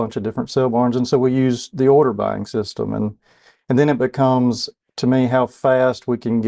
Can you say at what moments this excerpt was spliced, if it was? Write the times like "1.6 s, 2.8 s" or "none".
none